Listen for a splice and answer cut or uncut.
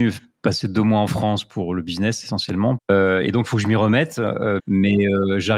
cut